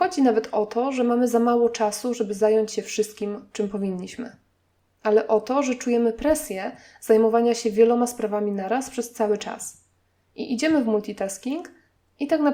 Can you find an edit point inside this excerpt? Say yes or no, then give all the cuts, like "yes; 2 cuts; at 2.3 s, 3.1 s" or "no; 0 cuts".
no; 0 cuts